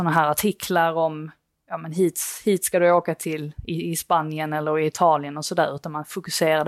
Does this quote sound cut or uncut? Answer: uncut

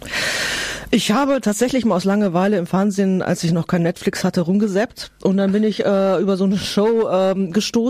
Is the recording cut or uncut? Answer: uncut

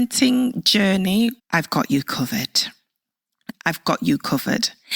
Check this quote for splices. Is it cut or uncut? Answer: cut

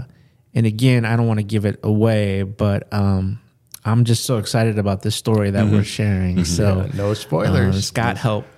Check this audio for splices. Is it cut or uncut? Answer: uncut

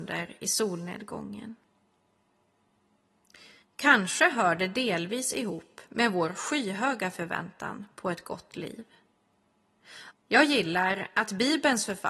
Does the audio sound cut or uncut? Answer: cut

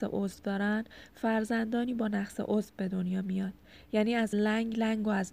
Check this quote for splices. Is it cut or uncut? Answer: uncut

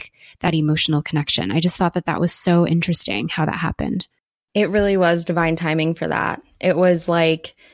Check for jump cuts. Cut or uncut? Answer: uncut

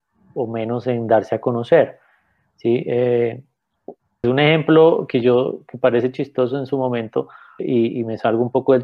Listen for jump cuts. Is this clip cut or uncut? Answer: cut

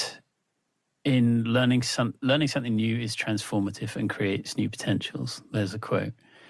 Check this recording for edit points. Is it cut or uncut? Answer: uncut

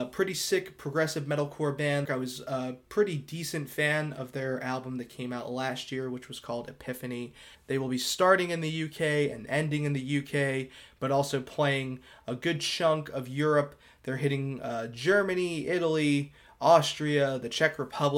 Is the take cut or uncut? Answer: cut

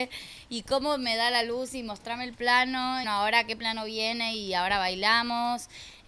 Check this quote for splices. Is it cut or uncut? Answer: cut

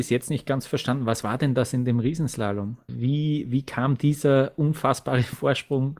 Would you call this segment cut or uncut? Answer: cut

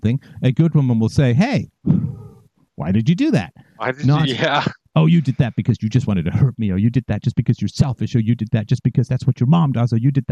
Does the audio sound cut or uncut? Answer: uncut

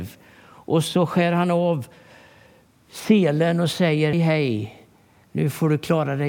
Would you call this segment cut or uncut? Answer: cut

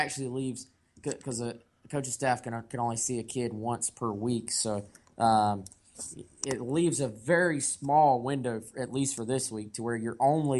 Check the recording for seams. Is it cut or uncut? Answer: uncut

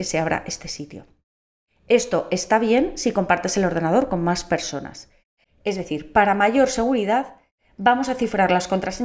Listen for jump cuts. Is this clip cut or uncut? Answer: cut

